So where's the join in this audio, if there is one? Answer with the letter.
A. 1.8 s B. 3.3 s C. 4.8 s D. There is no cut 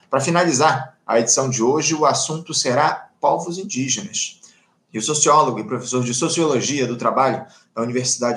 C